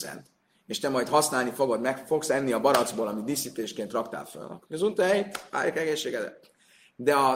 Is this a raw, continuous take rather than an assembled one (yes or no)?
no